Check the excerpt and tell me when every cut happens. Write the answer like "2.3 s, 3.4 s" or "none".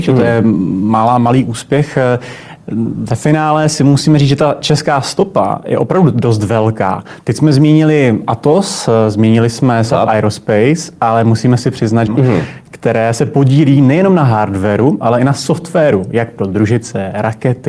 12.1 s